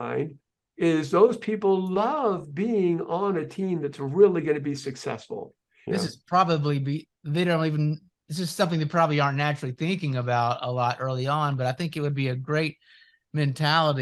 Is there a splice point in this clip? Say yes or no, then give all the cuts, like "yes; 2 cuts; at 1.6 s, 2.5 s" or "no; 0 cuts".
yes; 1 cut; at 5.9 s